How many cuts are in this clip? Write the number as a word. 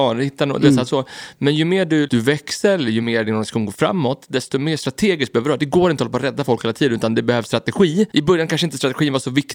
two